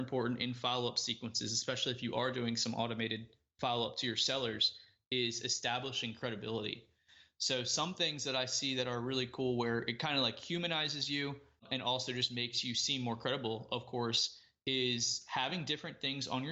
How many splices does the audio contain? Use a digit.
0